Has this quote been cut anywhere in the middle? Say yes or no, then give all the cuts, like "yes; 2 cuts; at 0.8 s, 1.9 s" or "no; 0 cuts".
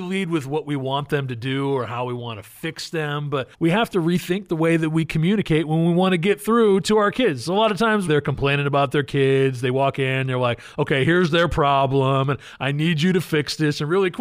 yes; 2 cuts; at 3.5 s, 8.1 s